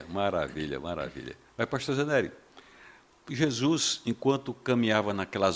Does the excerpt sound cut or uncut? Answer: uncut